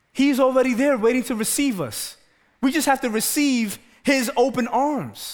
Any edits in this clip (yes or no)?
no